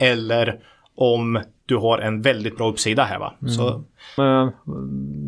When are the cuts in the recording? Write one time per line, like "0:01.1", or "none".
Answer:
0:04.2